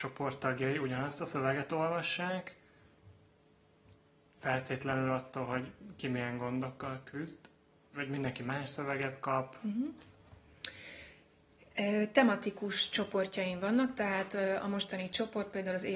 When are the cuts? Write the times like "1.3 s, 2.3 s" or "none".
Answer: 7.9 s